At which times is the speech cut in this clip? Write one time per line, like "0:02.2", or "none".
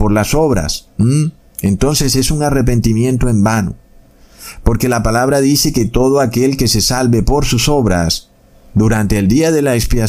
none